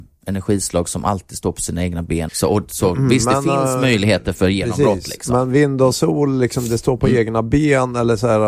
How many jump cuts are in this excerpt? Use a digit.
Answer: 1